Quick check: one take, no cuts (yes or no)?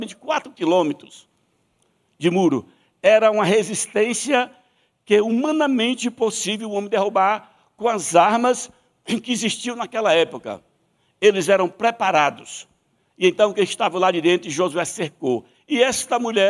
no